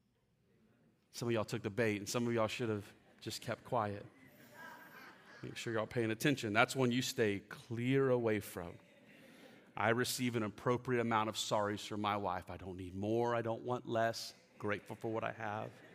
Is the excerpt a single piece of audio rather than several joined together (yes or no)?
yes